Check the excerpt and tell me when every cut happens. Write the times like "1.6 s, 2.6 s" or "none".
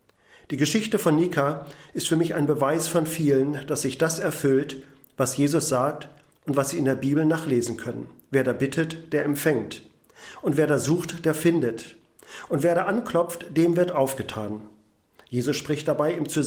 none